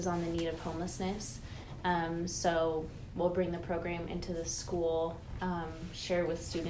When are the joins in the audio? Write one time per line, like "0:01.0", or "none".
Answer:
none